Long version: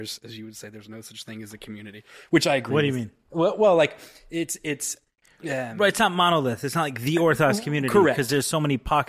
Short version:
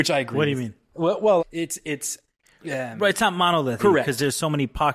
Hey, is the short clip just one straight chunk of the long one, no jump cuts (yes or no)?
no